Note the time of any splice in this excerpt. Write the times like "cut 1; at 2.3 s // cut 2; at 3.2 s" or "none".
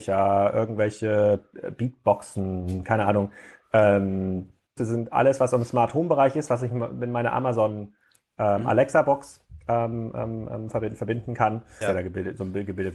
cut 1; at 4.8 s // cut 2; at 11.8 s

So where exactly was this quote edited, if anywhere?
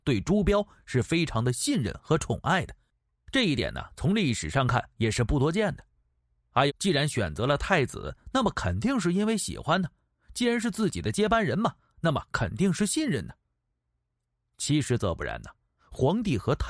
cut 1; at 6.7 s

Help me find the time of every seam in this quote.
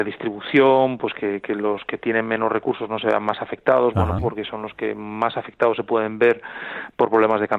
cut 1; at 4.2 s

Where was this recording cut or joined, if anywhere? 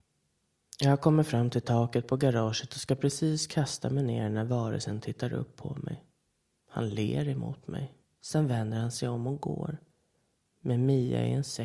cut 1; at 8.0 s

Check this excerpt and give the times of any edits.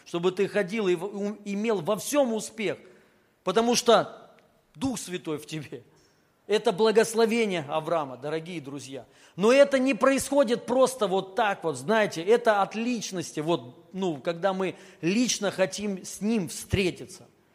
none

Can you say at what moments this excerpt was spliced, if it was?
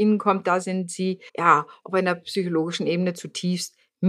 cut 1; at 1.3 s

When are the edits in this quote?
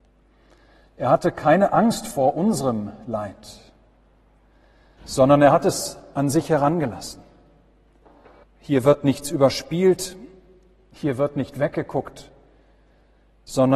cut 1; at 8.4 s

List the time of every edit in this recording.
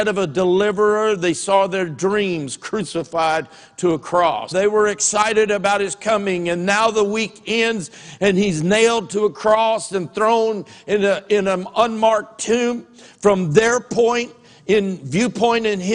cut 1; at 4.5 s

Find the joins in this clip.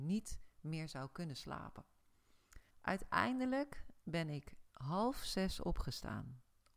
cut 1; at 2.7 s

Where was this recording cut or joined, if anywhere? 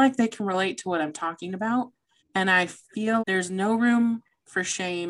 cut 1; at 2.2 s // cut 2; at 3.2 s

